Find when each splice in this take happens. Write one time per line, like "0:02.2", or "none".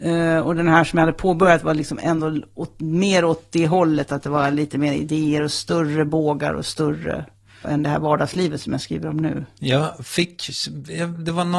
0:07.6